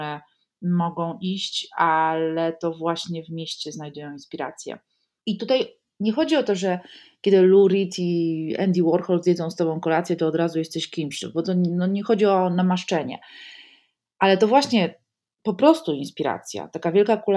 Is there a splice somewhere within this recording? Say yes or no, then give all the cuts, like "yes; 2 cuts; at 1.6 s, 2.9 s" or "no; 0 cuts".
yes; 1 cut; at 5.2 s